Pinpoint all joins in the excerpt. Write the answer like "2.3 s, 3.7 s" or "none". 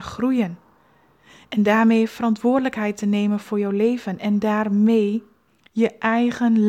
none